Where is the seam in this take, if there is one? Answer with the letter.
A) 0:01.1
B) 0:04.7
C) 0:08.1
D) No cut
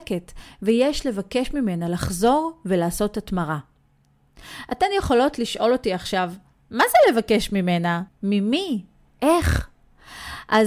C